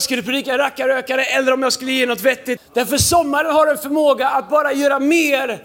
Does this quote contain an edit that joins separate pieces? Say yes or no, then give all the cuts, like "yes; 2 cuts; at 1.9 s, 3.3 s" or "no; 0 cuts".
yes; 1 cut; at 2.6 s